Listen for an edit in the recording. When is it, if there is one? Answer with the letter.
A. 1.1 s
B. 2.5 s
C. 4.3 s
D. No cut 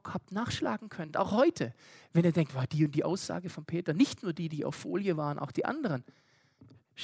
D